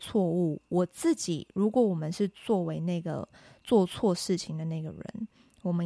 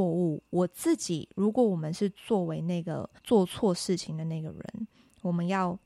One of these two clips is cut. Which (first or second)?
second